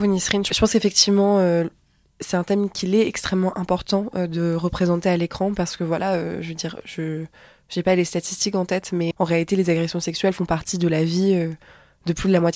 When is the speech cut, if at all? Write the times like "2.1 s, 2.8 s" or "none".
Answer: 9.1 s